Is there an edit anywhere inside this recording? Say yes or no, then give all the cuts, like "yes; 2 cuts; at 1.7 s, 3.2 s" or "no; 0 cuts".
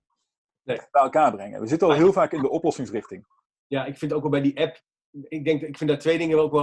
no; 0 cuts